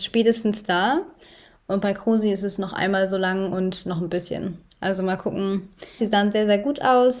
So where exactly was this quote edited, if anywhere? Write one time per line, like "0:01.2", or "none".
0:06.0